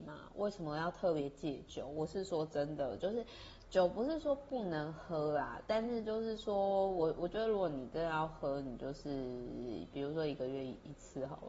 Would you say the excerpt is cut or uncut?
uncut